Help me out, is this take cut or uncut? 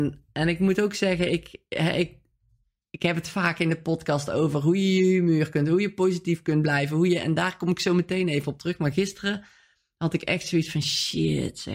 uncut